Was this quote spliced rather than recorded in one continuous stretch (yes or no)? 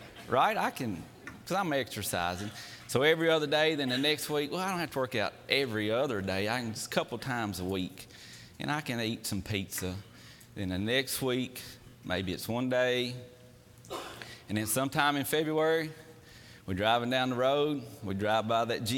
no